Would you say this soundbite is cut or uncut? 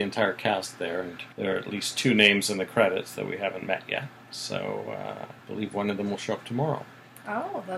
cut